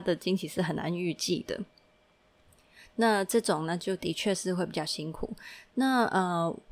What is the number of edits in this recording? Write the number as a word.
zero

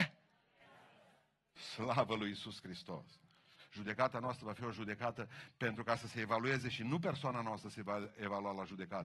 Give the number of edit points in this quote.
one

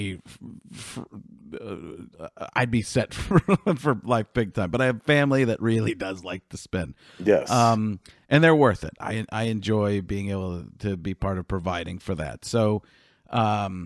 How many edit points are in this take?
zero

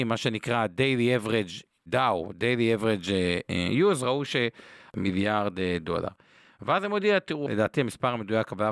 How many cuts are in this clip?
two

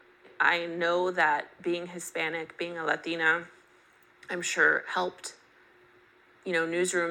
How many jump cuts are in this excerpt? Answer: zero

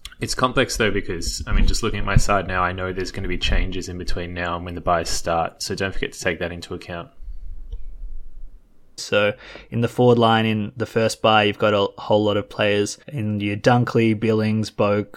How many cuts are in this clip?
two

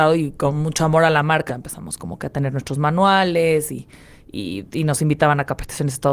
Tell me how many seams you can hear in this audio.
one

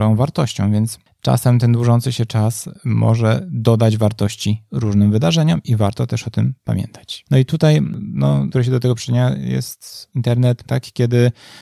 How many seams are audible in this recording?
three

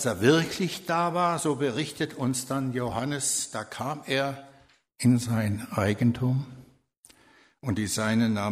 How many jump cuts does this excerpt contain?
zero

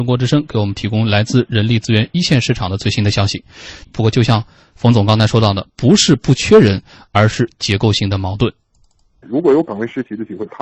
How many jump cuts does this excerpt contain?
two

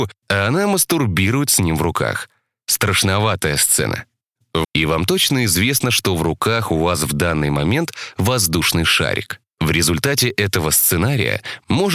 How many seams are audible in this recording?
one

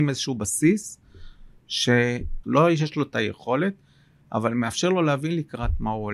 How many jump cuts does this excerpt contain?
one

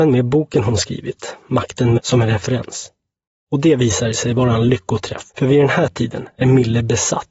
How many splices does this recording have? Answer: two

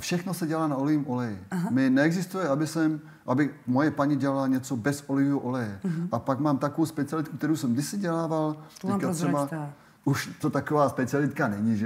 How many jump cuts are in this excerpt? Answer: zero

